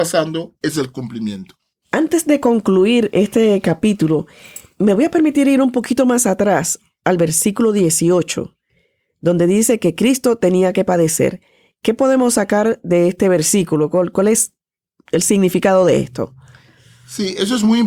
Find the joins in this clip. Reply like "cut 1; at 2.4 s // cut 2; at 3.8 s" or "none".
none

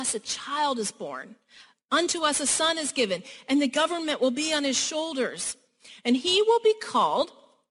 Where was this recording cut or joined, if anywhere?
none

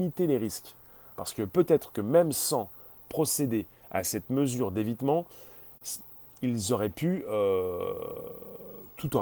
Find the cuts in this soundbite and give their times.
none

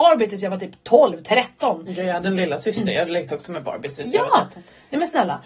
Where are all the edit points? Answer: none

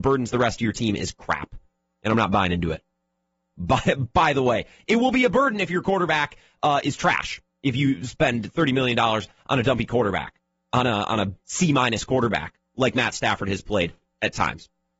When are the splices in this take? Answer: cut 1; at 3.5 s // cut 2; at 11.4 s

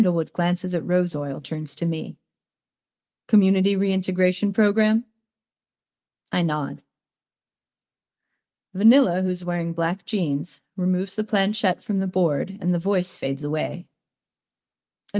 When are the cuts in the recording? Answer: cut 1; at 1.4 s

